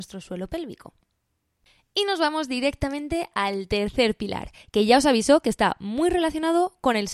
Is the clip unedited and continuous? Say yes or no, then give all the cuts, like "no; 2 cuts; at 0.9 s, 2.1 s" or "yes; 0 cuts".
yes; 0 cuts